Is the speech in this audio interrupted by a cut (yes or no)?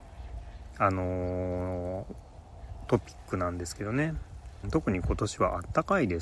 yes